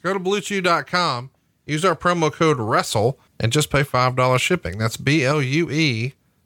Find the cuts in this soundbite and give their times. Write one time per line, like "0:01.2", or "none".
0:03.3